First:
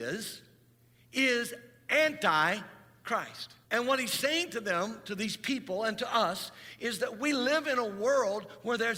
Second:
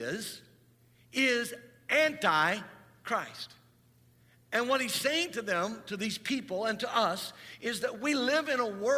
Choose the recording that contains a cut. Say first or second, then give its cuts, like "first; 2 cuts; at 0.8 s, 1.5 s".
first; 1 cut; at 3.6 s